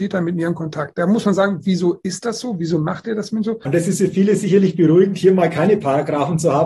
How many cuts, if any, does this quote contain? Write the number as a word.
one